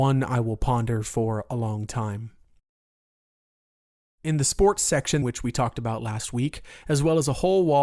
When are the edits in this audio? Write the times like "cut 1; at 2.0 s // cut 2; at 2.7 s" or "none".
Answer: cut 1; at 5.2 s